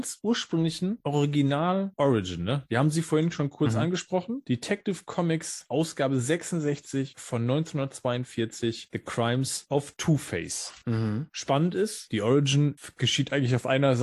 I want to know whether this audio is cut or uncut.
uncut